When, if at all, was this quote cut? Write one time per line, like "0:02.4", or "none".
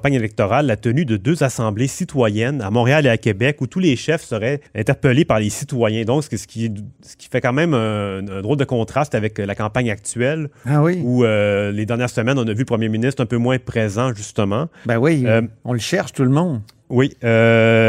none